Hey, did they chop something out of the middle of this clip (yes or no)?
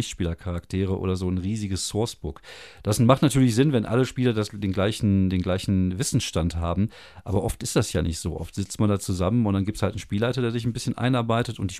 no